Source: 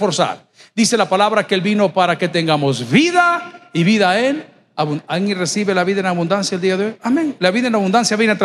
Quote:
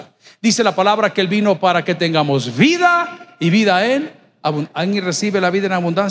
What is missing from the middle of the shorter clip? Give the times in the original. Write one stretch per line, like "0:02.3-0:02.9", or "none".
none